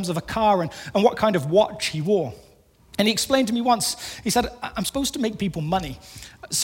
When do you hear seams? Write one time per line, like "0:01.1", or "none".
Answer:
none